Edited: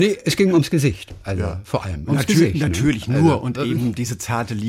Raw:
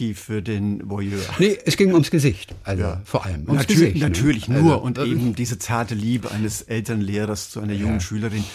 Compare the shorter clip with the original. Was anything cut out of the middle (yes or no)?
no